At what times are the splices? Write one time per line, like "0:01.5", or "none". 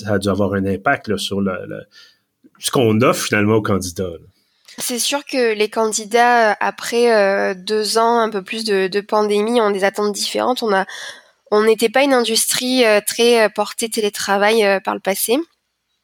0:04.8